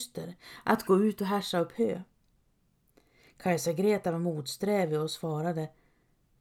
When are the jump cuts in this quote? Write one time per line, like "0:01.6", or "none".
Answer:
none